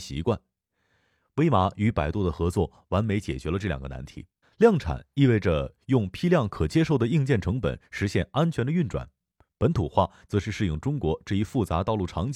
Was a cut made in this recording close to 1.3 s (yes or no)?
no